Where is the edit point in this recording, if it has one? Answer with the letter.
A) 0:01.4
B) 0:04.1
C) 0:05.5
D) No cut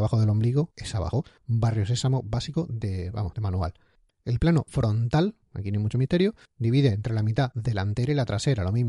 B